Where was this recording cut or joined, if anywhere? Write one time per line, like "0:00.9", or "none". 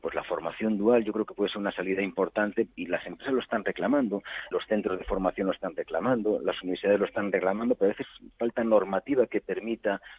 0:04.5